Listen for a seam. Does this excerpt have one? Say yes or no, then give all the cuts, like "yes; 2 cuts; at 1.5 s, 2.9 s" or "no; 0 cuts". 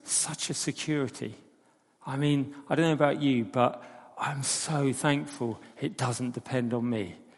no; 0 cuts